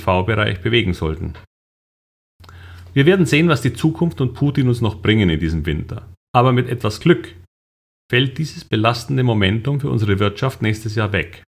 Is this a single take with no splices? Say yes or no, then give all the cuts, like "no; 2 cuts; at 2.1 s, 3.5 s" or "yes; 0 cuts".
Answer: no; 1 cut; at 6.3 s